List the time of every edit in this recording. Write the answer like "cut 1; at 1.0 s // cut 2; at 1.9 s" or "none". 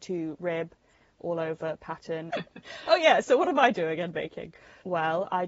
cut 1; at 2.3 s